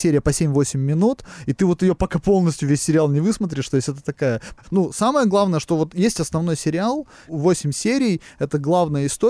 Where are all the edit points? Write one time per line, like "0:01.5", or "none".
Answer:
0:04.6